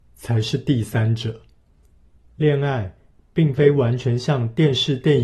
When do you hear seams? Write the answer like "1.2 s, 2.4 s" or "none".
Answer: 2.2 s